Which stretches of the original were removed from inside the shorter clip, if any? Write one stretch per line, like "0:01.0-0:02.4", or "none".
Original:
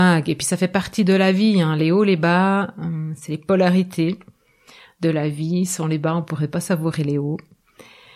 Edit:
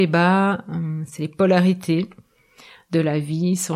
none